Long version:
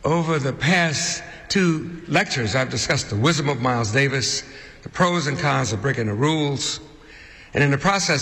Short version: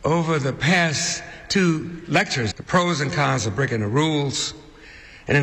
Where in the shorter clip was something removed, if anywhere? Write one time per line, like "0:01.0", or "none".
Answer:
0:02.5